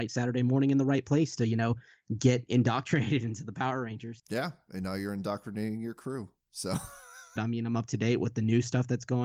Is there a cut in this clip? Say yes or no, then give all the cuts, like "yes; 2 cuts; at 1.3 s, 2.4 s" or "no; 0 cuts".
yes; 1 cut; at 7.4 s